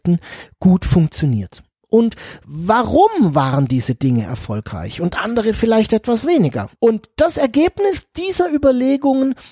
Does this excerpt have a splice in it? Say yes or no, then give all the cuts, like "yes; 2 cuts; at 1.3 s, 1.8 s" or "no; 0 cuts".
yes; 1 cut; at 6.8 s